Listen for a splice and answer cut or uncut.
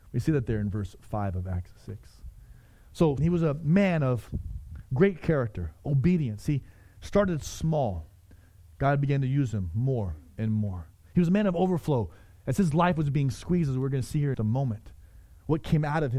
cut